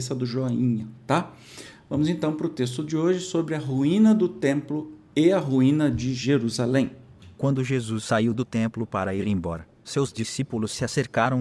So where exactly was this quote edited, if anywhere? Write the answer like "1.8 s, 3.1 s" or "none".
none

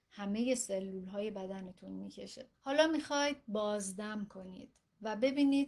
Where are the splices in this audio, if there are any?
2.5 s

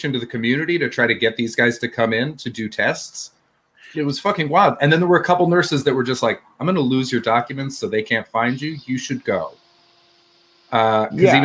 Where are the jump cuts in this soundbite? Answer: none

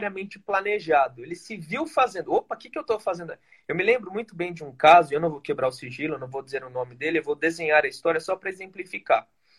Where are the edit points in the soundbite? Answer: none

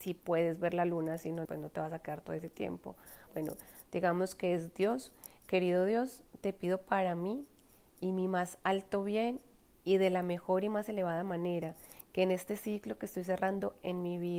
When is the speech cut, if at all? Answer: 1.4 s, 3.3 s

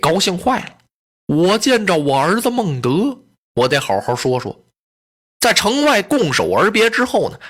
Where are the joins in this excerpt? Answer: 1.1 s

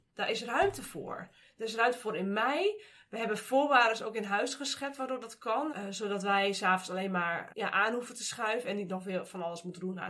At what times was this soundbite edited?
5.7 s, 7.5 s

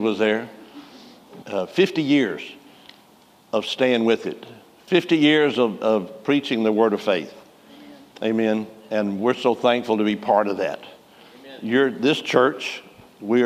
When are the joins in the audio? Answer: 1.4 s

